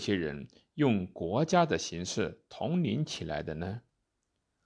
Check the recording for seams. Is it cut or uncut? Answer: uncut